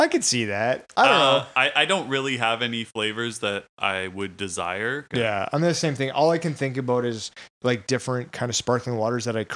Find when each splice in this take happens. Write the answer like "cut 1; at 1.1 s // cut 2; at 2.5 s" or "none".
cut 1; at 5.1 s

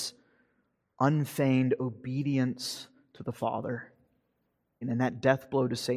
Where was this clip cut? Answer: cut 1; at 4.8 s

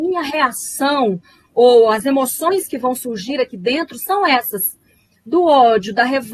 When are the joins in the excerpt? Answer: none

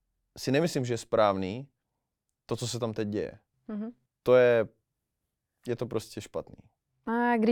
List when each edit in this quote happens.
none

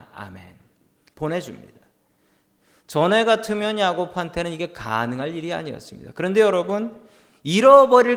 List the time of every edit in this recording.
cut 1; at 1.1 s

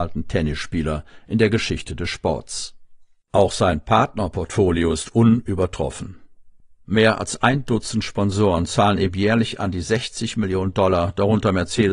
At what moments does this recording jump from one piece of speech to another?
none

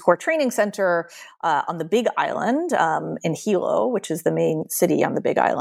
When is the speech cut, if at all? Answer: none

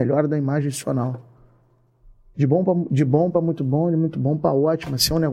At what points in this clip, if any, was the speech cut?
none

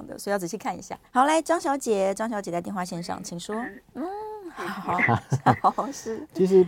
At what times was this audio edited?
cut 1; at 1.1 s // cut 2; at 3.9 s

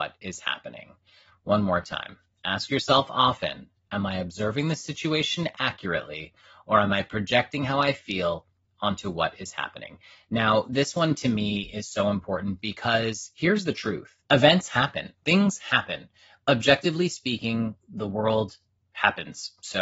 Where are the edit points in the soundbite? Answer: cut 1; at 14.2 s

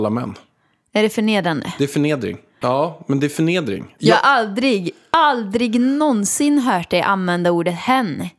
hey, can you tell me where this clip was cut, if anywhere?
cut 1; at 2.6 s // cut 2; at 4.0 s

